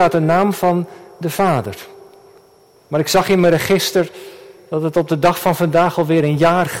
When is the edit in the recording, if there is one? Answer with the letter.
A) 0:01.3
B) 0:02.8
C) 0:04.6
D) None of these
B